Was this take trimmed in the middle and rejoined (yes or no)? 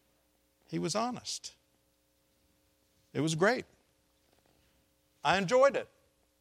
no